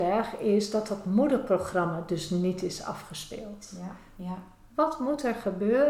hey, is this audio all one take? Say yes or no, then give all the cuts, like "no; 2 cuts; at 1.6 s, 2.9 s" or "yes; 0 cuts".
no; 1 cut; at 4.2 s